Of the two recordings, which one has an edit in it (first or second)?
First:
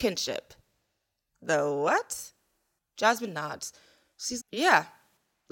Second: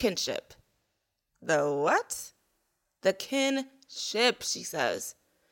first